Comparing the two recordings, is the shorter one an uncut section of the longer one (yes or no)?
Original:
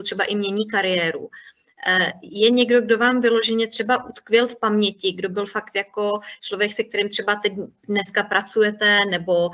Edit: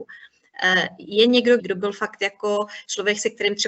no